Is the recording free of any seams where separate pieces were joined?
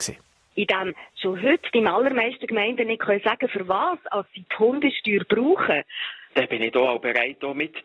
no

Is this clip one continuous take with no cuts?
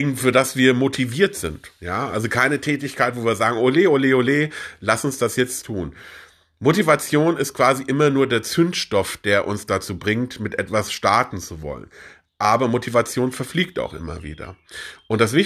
yes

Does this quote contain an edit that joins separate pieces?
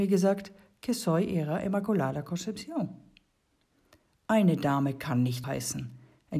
yes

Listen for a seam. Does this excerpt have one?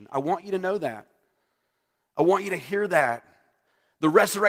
no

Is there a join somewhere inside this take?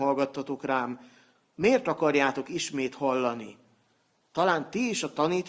no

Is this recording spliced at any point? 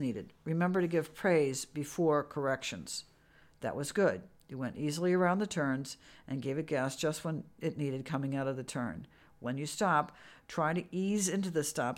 no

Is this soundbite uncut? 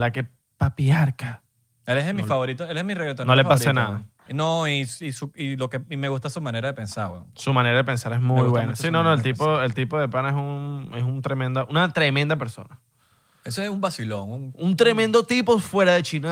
no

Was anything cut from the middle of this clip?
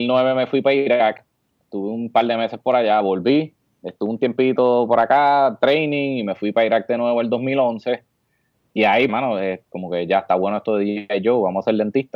yes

